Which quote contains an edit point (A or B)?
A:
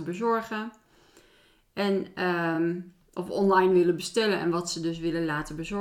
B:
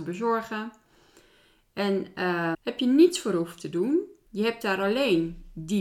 B